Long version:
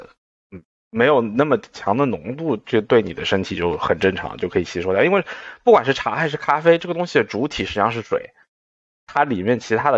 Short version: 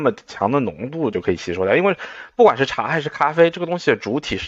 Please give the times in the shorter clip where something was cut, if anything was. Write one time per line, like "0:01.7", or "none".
0:01.1